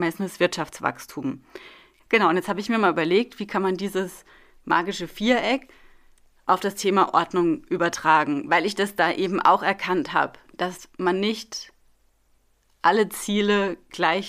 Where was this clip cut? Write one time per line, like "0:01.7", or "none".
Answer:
0:02.0